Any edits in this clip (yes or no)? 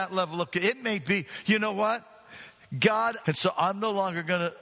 yes